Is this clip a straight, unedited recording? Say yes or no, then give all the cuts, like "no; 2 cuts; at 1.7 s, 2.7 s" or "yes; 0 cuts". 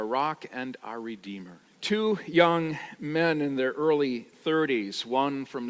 no; 1 cut; at 1.7 s